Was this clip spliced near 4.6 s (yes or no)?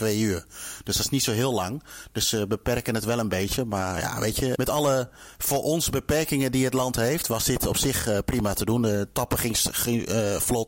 yes